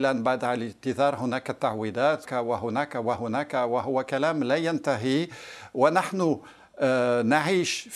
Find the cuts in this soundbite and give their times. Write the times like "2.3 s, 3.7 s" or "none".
2.3 s